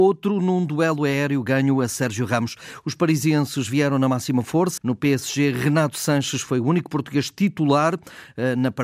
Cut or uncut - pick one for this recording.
cut